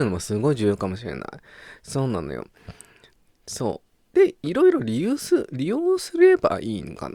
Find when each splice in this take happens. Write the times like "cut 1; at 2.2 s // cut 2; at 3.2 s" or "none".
none